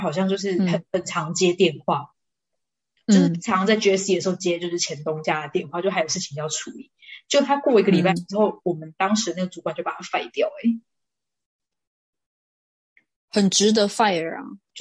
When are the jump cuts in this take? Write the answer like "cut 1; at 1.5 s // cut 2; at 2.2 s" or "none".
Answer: none